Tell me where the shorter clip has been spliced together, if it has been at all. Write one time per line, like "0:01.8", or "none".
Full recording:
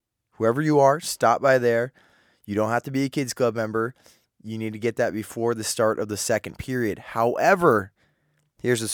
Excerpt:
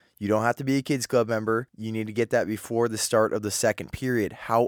0:01.7